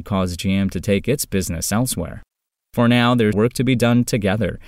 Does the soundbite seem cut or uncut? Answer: cut